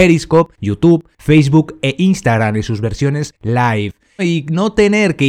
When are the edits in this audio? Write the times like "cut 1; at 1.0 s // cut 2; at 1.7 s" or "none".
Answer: cut 1; at 4.2 s